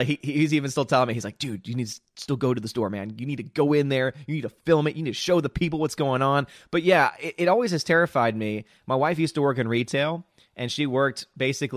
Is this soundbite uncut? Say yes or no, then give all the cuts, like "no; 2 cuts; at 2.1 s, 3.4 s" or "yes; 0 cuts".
yes; 0 cuts